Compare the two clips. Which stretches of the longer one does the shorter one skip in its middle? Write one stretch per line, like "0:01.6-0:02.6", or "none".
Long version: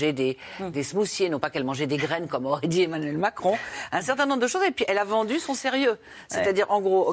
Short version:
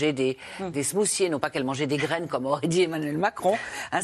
none